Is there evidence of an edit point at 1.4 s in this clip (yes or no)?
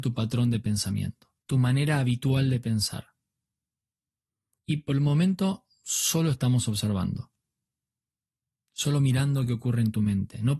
yes